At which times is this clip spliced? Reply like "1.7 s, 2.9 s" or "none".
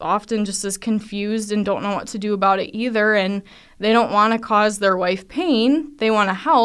none

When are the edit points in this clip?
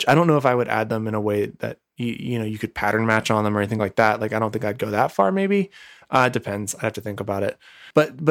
none

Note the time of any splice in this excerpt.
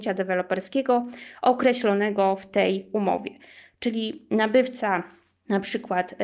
none

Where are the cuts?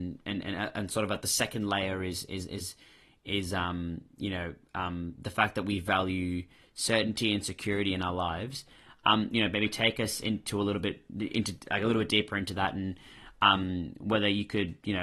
9.3 s

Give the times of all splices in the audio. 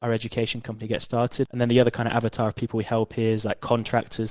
1.4 s

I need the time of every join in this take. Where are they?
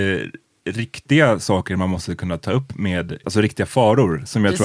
3.2 s

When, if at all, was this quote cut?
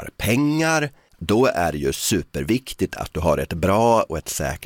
1.1 s

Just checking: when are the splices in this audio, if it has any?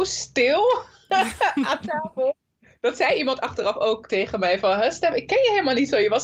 none

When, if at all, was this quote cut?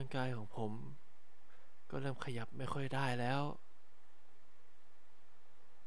none

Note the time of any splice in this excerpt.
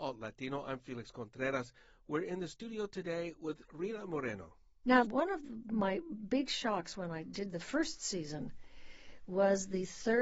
5.0 s

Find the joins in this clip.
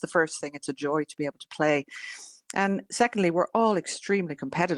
none

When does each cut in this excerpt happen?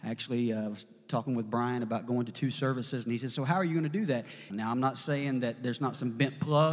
4.5 s

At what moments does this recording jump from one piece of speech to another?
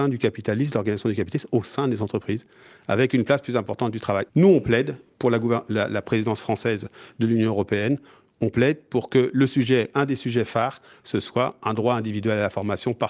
4.3 s

